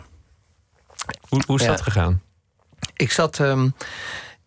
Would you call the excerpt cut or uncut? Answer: cut